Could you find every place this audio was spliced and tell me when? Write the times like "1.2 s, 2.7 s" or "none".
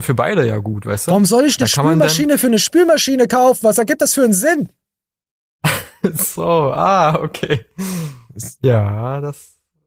none